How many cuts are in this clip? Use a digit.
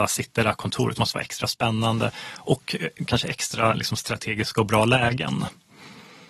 1